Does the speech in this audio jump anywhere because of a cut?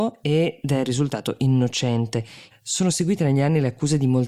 yes; 1 cut; at 2.5 s

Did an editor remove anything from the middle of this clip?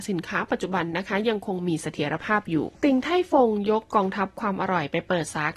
yes; 1 cut; at 2.7 s

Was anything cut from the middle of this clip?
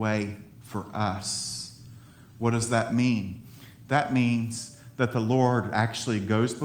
no; 0 cuts

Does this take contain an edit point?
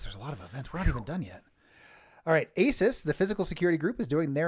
no; 0 cuts

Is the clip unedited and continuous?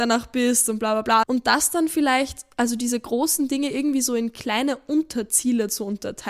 no; 1 cut; at 1.2 s

